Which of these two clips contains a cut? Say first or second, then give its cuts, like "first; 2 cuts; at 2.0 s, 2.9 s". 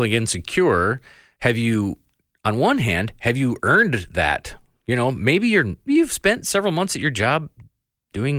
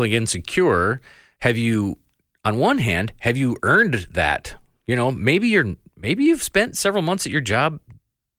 first; 1 cut; at 5.9 s